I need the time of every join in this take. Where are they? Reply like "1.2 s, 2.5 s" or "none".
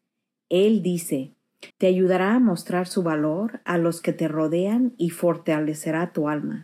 1.7 s